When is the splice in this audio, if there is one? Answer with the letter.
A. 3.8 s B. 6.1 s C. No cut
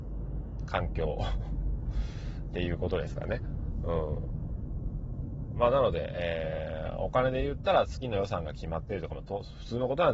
C